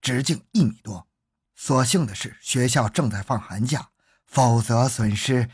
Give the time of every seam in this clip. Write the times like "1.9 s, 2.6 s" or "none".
1.4 s